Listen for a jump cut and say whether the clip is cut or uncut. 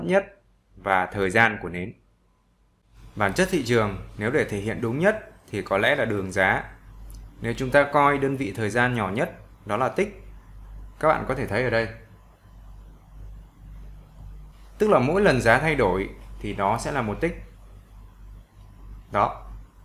uncut